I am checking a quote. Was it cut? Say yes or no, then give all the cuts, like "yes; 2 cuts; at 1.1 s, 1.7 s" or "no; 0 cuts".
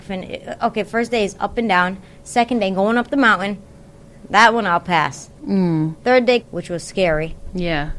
yes; 1 cut; at 6.4 s